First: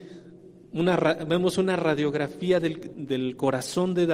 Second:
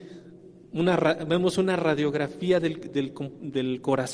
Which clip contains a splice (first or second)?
first